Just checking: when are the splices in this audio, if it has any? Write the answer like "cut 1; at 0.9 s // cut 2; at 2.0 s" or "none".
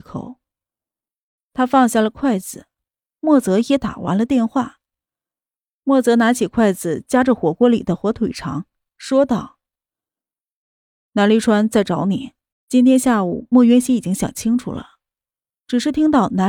cut 1; at 12.5 s